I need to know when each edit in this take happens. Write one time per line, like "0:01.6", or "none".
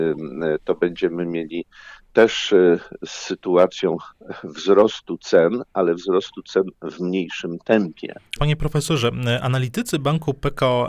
0:08.4

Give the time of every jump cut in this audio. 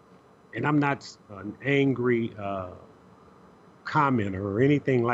0:01.3

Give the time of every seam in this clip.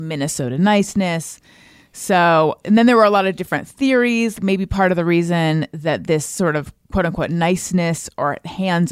0:02.6
0:04.3

